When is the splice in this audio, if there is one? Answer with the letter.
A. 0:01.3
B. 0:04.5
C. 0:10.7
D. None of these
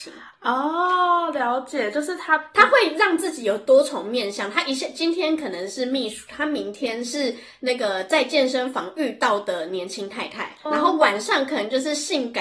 C